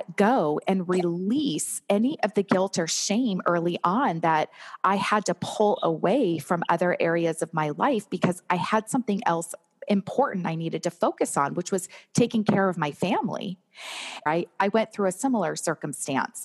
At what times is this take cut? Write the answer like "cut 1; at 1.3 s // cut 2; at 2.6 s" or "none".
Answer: cut 1; at 14.3 s